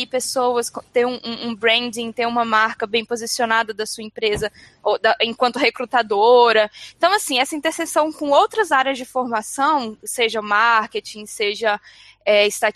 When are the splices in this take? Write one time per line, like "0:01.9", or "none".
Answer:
none

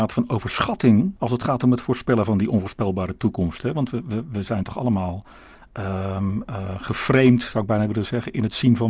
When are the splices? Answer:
0:01.2

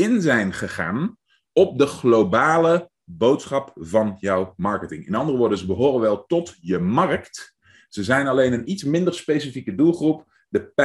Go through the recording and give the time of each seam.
none

